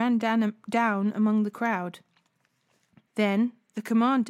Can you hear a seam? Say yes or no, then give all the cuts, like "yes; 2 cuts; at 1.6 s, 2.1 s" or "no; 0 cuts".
yes; 1 cut; at 3.1 s